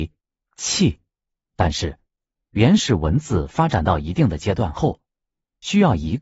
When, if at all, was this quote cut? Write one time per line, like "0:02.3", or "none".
0:01.4